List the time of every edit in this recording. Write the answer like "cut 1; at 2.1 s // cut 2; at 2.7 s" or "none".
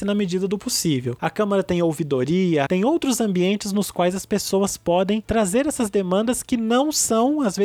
cut 1; at 1.2 s // cut 2; at 2.7 s